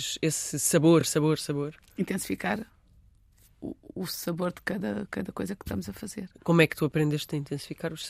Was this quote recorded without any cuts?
yes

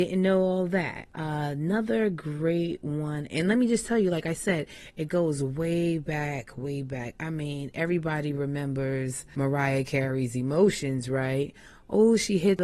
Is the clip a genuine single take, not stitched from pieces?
yes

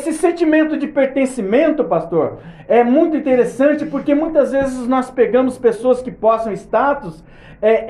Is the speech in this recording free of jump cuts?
yes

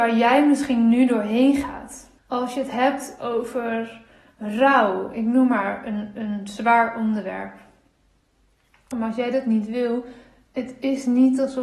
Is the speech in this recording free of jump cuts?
no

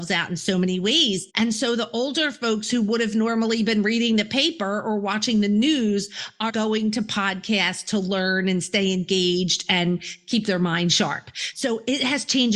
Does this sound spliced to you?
yes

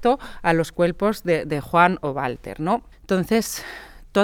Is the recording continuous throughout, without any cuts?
no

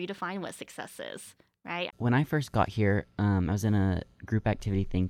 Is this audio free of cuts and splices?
no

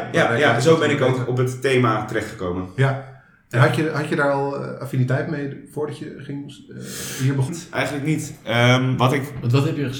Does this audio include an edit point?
yes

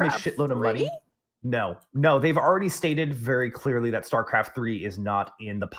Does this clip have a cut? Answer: no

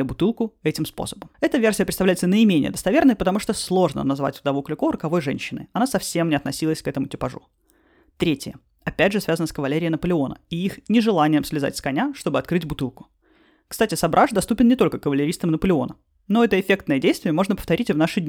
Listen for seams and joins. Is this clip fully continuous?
no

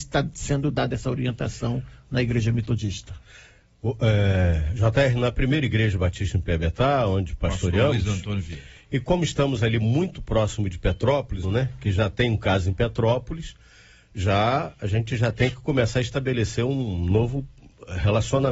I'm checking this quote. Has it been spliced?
yes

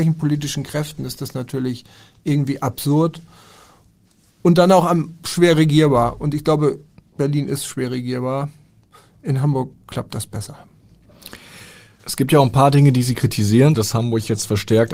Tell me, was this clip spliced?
yes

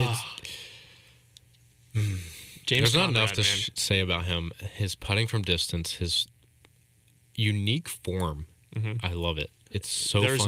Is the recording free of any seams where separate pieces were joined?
yes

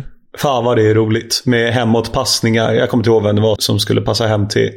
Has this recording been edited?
yes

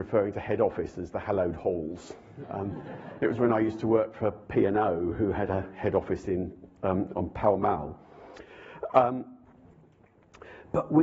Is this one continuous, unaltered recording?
yes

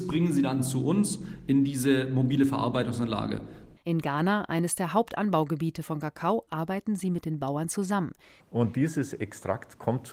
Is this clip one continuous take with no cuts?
no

